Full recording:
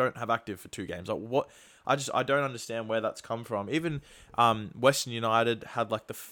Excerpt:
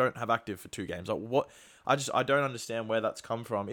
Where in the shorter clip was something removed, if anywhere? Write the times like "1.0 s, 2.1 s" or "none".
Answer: none

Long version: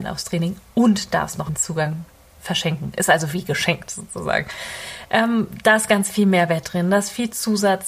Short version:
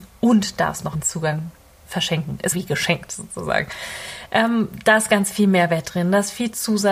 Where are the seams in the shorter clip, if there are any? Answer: 2.5 s

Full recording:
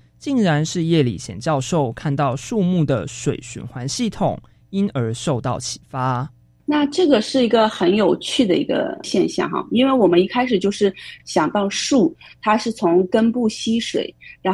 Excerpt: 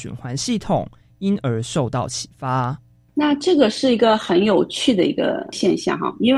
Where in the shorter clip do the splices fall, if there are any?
none

